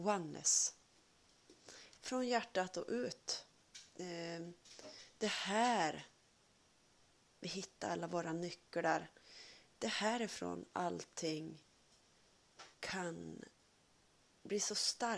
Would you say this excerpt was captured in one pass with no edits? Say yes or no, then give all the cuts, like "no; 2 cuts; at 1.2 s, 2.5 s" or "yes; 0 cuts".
no; 3 cuts; at 2.0 s, 9.7 s, 12.7 s